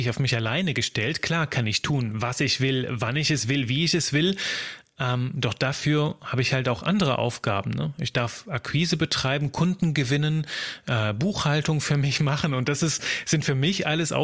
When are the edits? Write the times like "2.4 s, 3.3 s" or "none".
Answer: none